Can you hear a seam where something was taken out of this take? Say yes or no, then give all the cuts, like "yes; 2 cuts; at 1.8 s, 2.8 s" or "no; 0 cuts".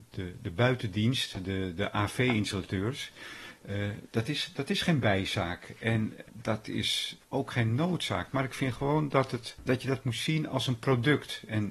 yes; 1 cut; at 7.2 s